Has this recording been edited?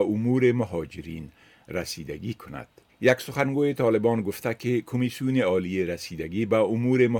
yes; 1 cut; at 2.9 s

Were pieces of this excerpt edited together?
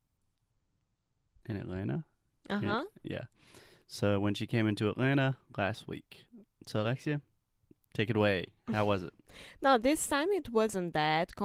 no; 0 cuts

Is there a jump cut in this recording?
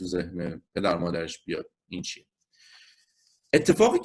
yes; 1 cut; at 1.9 s

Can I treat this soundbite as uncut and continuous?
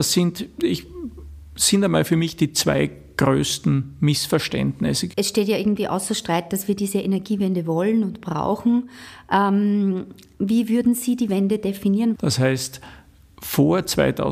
no; 2 cuts; at 5.1 s, 12.2 s

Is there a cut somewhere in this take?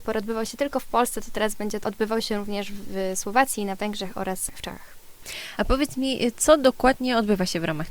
no; 0 cuts

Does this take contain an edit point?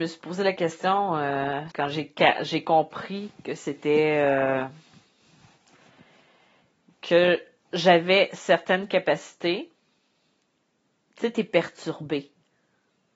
yes; 1 cut; at 1.7 s

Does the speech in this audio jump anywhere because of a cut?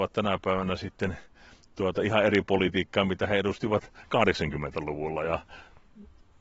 no; 0 cuts

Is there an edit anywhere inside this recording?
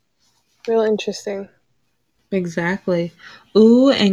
no; 0 cuts

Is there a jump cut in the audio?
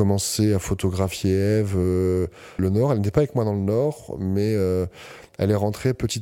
yes; 1 cut; at 2.6 s

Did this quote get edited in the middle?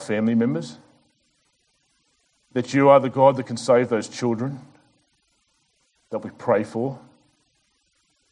no; 0 cuts

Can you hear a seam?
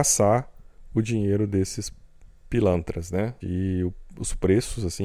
yes; 1 cut; at 3.4 s

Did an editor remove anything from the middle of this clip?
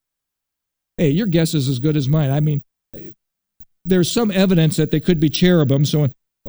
no; 0 cuts

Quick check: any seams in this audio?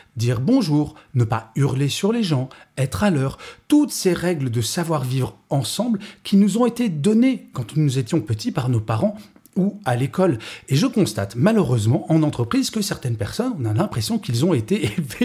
yes; 1 cut; at 1.1 s

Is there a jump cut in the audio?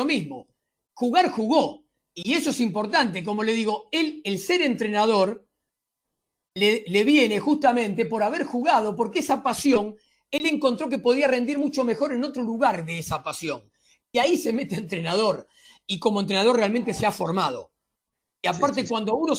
no; 0 cuts

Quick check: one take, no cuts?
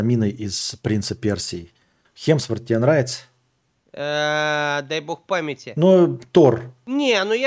no; 1 cut; at 2.0 s

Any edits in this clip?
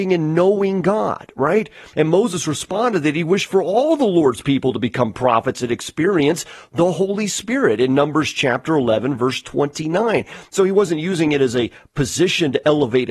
yes; 1 cut; at 1.9 s

